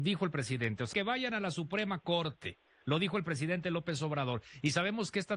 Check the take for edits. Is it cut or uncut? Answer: cut